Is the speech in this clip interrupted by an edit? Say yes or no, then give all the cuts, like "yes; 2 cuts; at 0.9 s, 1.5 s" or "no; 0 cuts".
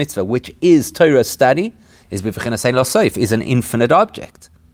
no; 0 cuts